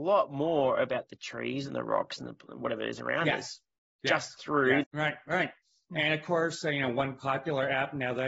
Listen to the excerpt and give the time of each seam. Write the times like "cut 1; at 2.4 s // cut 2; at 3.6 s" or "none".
cut 1; at 4.8 s